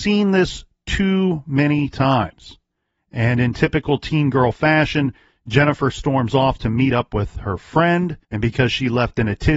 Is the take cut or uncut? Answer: cut